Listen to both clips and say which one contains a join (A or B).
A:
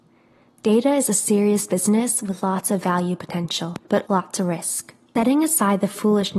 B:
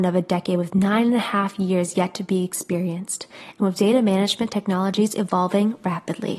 A